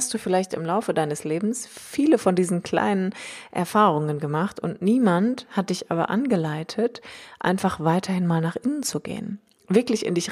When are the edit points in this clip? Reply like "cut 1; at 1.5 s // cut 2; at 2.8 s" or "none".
none